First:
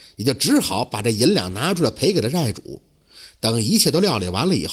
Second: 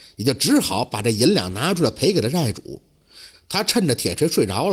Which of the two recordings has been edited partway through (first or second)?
second